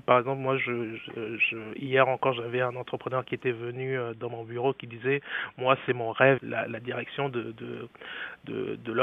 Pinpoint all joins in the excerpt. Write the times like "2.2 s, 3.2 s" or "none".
6.4 s